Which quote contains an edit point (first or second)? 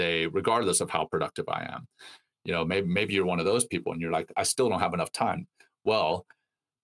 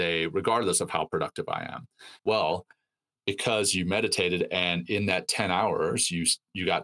second